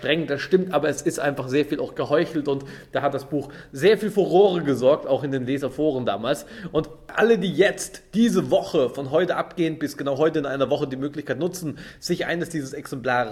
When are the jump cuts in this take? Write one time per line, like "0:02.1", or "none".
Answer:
none

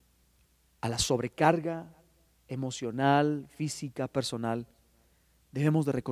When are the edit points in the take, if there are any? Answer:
none

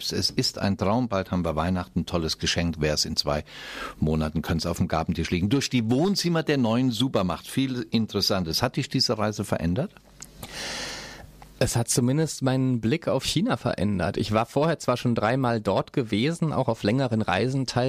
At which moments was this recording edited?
none

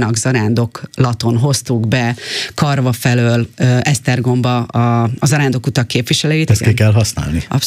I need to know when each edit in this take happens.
0:06.5

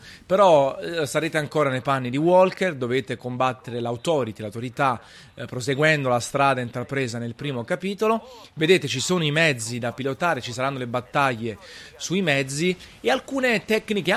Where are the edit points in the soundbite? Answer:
none

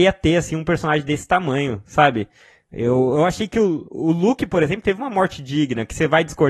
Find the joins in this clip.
none

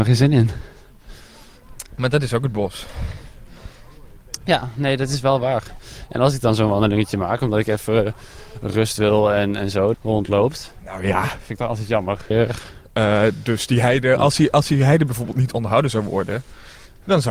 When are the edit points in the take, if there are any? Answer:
0:09.9
0:12.3

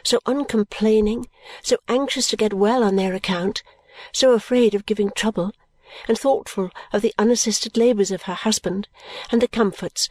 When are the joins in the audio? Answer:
0:06.2

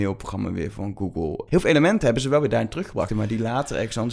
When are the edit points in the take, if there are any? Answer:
0:01.5
0:03.1

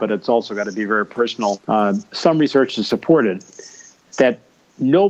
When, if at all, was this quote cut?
0:01.6

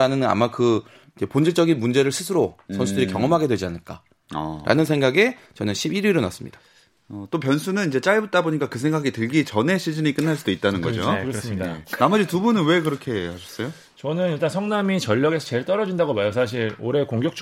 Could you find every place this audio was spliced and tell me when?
none

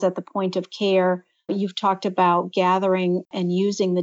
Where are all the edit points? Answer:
none

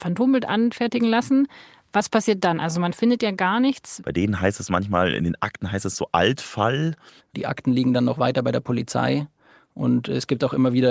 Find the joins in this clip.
0:04.0
0:07.2

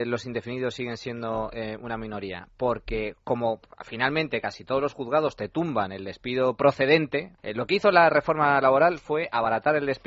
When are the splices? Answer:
0:07.4

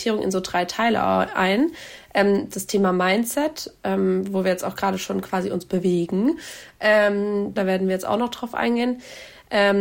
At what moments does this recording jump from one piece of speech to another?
0:07.6

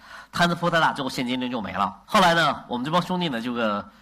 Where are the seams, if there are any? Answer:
0:02.0

